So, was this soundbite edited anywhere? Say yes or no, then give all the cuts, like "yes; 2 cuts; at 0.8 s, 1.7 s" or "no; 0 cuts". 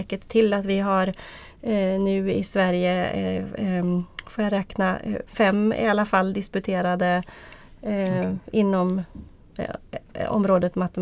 no; 0 cuts